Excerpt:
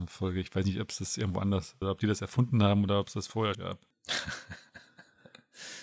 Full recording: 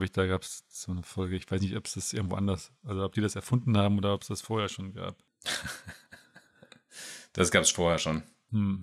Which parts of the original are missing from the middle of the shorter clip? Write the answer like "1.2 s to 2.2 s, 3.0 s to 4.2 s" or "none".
2.8 s to 3.0 s, 4.7 s to 4.9 s